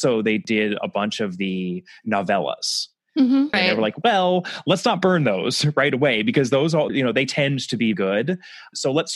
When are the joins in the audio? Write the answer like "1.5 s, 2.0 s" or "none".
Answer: 3.5 s, 6.9 s, 7.9 s